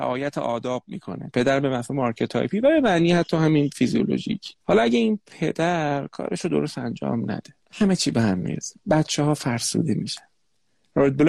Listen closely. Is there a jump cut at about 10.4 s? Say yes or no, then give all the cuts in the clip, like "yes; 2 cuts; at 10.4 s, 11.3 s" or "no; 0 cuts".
no; 2 cuts; at 4.6 s, 7.6 s